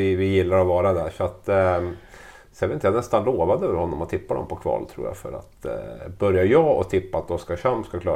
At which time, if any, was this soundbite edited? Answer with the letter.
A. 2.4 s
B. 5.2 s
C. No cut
C